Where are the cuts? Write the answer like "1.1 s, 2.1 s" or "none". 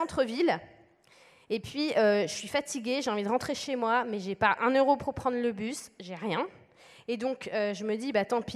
none